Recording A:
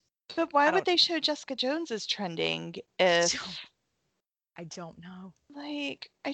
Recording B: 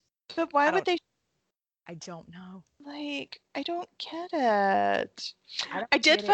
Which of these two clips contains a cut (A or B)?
B